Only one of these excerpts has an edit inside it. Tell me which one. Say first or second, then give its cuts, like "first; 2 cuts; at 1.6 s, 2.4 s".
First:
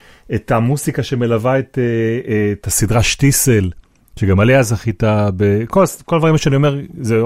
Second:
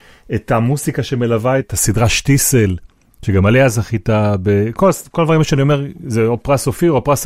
second; 1 cut; at 1.6 s